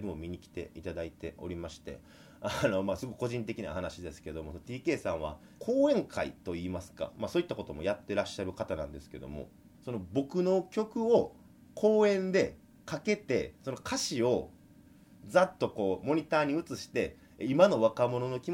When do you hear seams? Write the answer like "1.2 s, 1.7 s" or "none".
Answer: 9.7 s